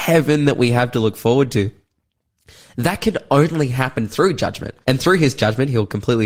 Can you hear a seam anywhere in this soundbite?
yes; 1 cut; at 4.8 s

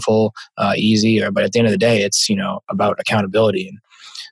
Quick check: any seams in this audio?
no; 0 cuts

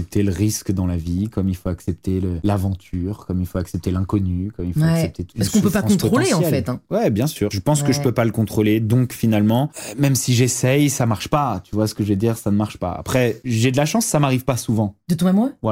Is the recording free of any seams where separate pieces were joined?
no; 1 cut; at 7.5 s

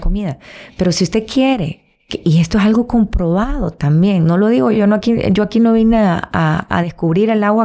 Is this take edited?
yes; 1 cut; at 4.7 s

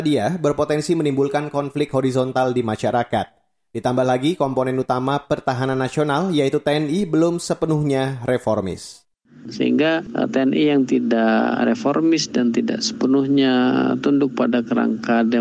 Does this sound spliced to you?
no; 0 cuts

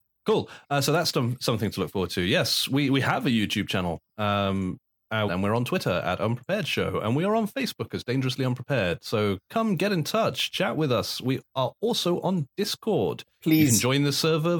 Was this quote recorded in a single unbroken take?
no; 1 cut; at 5.3 s

